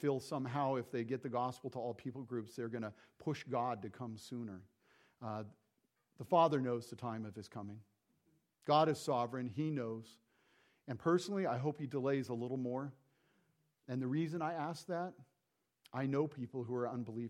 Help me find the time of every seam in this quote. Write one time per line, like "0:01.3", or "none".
none